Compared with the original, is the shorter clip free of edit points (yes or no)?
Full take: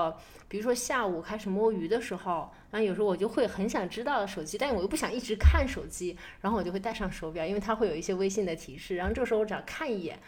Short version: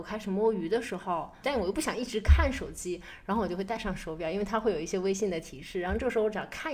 no